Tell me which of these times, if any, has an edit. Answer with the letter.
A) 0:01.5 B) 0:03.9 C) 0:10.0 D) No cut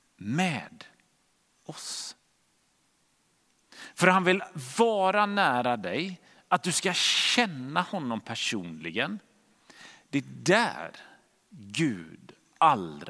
D